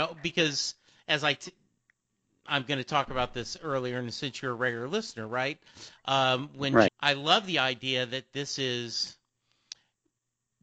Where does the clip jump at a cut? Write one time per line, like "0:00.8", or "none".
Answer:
0:06.9